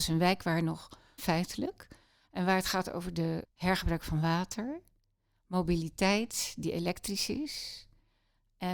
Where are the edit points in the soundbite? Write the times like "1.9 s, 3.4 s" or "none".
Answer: 1.2 s, 3.4 s